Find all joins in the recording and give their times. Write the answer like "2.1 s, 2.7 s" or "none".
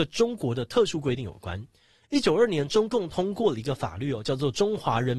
2.2 s